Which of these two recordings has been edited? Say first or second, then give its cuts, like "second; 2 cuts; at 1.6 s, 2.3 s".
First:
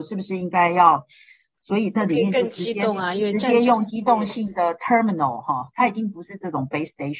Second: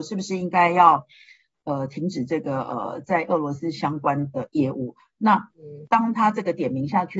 first; 1 cut; at 1.6 s